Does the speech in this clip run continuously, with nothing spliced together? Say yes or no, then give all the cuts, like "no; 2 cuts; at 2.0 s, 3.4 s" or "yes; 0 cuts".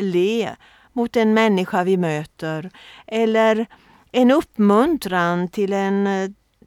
yes; 0 cuts